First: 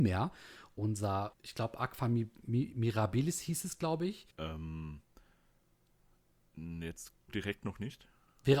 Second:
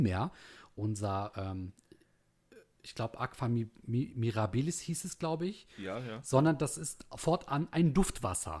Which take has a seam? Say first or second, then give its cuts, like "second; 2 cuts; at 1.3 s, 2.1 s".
first; 3 cuts; at 1.3 s, 4.3 s, 7.3 s